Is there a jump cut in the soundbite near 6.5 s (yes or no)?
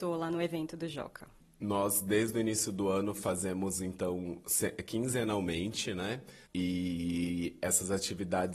yes